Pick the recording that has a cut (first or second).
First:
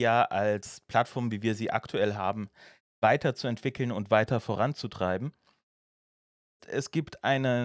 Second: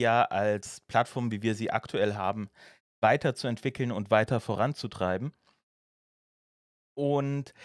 first